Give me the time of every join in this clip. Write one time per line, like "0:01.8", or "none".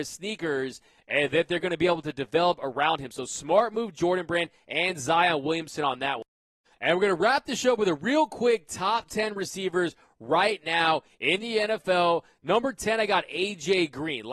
none